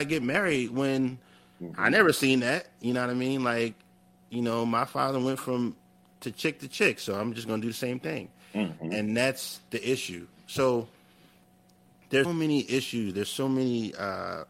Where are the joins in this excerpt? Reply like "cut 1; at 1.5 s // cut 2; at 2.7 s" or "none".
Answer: cut 1; at 12.2 s